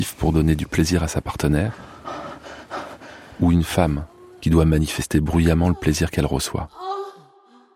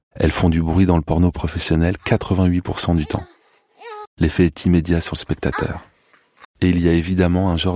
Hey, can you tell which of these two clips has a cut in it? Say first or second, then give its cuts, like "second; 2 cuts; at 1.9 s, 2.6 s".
second; 2 cuts; at 4.0 s, 6.4 s